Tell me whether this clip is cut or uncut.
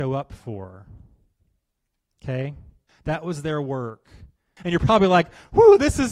cut